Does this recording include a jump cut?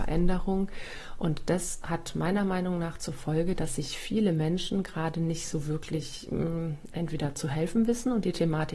no; 0 cuts

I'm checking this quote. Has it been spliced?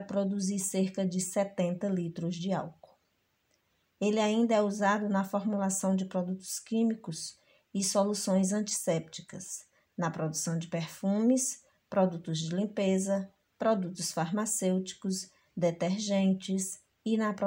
no; 0 cuts

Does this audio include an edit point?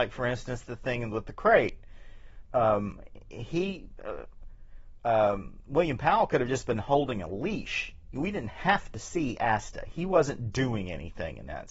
no; 0 cuts

